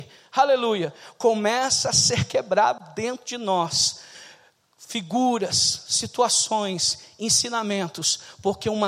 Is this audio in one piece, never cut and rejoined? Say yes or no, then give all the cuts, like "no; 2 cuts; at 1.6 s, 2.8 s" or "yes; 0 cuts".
yes; 0 cuts